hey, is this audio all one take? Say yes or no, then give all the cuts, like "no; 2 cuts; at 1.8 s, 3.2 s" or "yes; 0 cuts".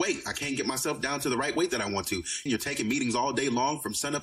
no; 1 cut; at 2.5 s